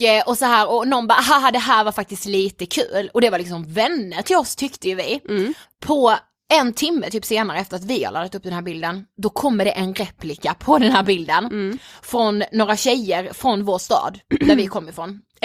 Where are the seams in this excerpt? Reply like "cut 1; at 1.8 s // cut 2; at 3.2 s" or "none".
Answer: cut 1; at 5.6 s